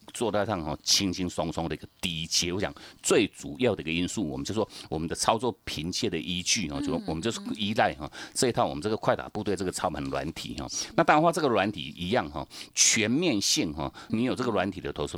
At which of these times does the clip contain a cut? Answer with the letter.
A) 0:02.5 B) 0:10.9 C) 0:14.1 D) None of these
C